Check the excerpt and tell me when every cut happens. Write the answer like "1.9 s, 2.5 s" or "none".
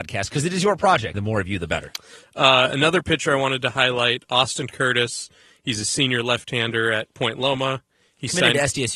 1.1 s